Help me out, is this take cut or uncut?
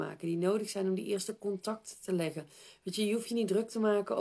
uncut